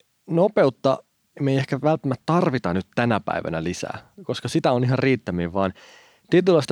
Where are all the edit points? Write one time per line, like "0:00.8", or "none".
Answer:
none